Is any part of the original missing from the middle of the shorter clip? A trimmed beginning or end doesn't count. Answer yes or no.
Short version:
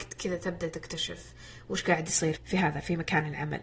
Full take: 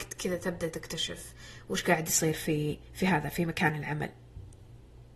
yes